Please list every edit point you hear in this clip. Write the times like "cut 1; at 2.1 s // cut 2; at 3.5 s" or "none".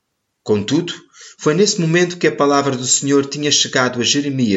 none